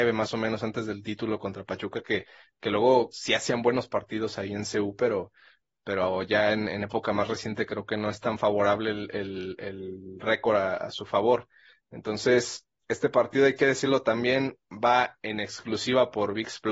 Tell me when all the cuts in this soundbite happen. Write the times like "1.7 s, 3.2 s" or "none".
none